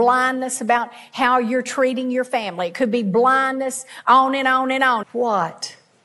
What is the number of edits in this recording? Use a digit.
1